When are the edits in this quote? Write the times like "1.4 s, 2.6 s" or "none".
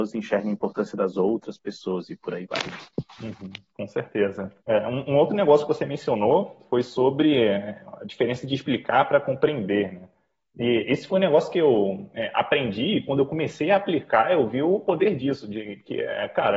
4.6 s